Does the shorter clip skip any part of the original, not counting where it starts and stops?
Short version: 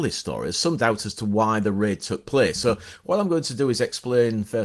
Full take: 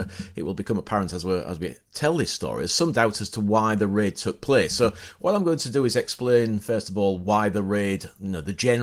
no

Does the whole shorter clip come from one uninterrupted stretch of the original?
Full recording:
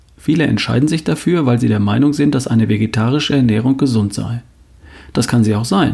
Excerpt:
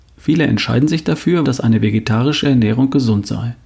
no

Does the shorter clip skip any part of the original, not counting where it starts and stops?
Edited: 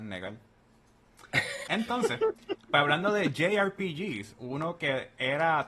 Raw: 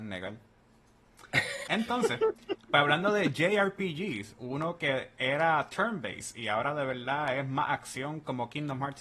no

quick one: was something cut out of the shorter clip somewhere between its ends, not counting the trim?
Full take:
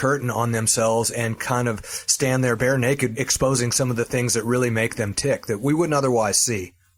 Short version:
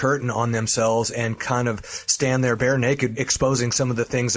no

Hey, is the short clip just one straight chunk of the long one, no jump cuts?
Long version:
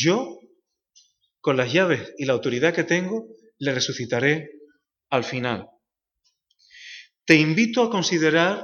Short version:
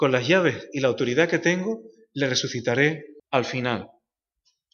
no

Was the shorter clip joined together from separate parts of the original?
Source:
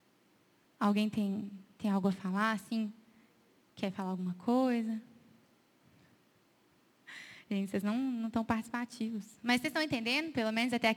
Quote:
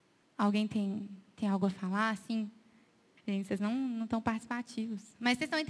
yes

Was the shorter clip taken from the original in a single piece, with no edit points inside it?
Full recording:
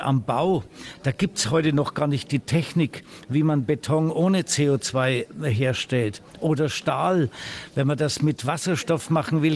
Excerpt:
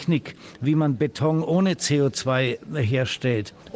yes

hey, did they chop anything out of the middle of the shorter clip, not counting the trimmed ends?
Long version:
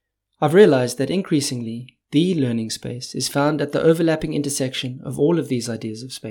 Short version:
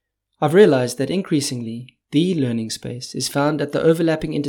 no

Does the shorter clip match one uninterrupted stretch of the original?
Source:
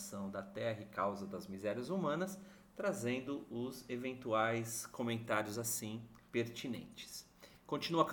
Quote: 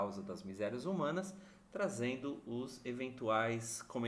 yes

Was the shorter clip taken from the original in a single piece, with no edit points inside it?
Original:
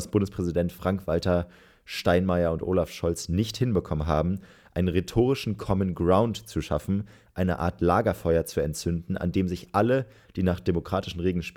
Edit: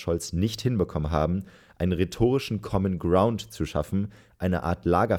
yes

